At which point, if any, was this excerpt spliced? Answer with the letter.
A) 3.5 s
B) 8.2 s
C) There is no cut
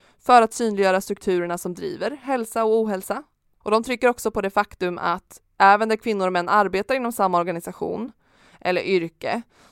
A